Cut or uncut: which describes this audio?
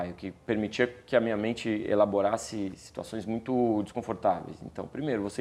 uncut